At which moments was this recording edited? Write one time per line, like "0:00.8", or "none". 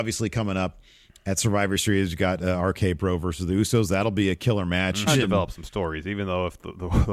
0:05.1